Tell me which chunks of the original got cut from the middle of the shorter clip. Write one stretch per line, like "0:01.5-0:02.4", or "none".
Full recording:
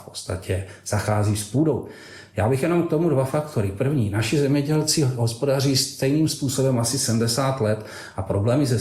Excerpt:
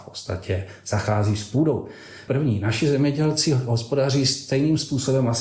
0:02.3-0:03.8